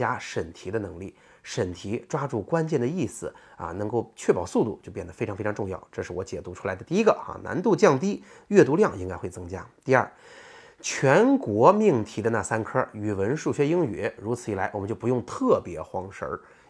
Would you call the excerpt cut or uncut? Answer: uncut